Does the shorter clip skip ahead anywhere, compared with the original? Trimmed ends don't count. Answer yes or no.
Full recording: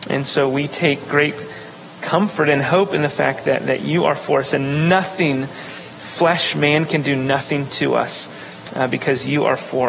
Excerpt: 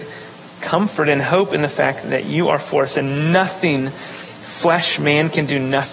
yes